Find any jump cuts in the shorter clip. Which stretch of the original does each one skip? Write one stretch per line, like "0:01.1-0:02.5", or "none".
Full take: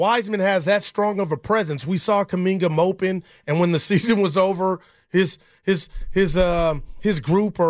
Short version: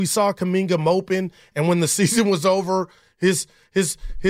none